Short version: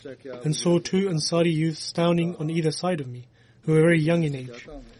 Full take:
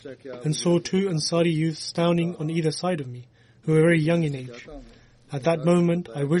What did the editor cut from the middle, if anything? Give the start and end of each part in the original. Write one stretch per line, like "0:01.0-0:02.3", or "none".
none